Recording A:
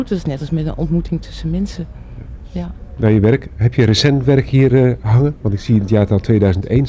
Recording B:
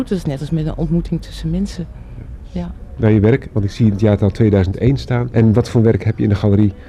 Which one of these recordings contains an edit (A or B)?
B